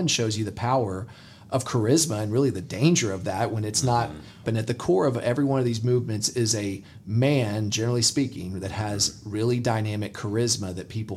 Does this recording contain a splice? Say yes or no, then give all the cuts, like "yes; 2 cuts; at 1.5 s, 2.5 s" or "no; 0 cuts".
yes; 1 cut; at 4.4 s